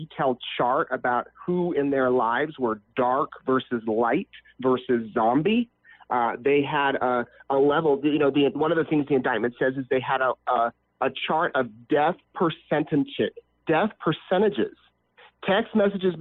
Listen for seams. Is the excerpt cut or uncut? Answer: uncut